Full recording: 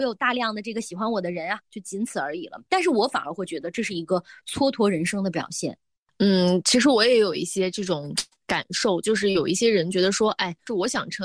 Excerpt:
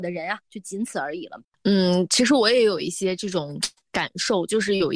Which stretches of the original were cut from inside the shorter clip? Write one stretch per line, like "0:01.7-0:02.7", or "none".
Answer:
0:02.7-0:06.0